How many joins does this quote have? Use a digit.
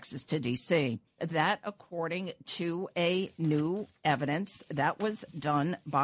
1